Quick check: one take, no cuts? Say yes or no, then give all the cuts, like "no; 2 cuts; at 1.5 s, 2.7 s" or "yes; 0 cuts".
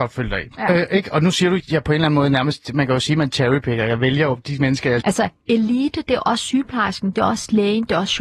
no; 2 cuts; at 1.6 s, 5.0 s